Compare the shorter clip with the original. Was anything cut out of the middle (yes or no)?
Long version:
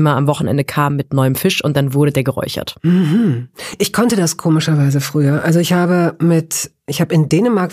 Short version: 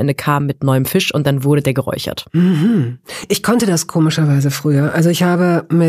no